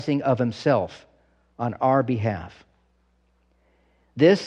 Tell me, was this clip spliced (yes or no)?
no